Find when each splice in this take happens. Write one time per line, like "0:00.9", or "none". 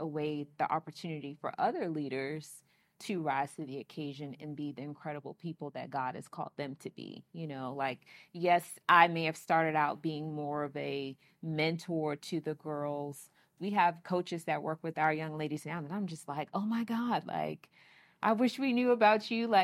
0:13.6